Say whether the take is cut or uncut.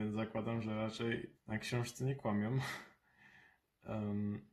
cut